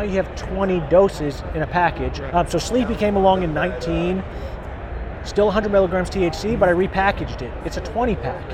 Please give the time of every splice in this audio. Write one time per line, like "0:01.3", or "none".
0:02.3